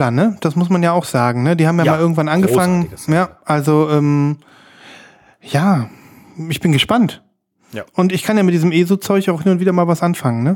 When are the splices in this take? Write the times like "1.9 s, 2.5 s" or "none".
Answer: none